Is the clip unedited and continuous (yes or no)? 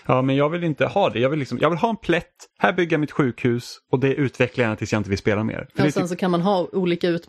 yes